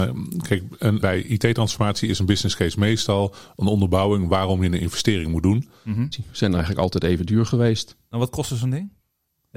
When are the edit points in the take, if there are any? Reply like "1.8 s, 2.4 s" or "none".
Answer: 1.0 s, 6.1 s